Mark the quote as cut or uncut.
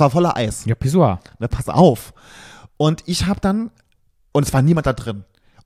uncut